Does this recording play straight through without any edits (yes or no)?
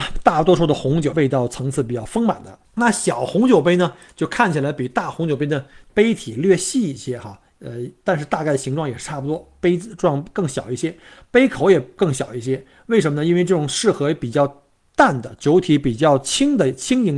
no